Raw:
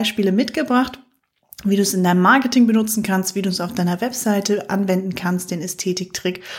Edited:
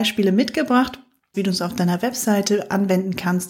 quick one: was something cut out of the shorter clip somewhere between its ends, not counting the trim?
yes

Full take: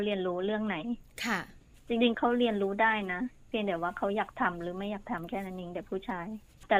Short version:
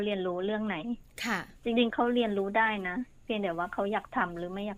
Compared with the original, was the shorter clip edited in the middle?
yes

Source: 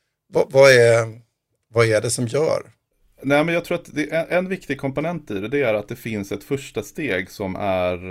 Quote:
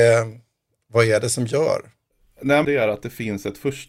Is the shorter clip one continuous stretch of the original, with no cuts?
no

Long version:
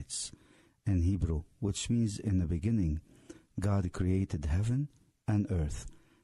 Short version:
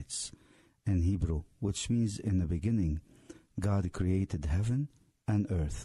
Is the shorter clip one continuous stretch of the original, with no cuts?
yes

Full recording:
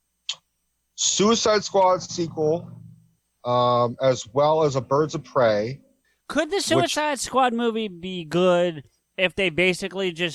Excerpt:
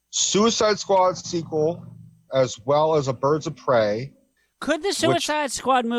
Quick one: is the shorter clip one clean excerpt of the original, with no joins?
no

